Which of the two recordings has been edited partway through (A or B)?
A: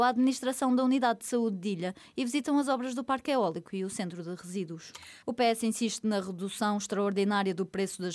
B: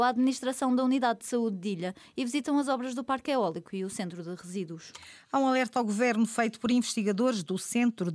A